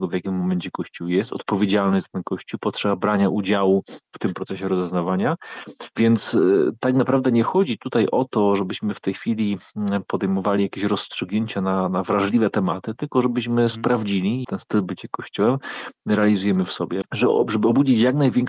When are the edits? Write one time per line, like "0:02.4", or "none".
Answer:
0:05.9
0:14.4
0:17.0